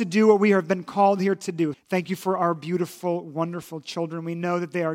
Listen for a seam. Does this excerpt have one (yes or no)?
yes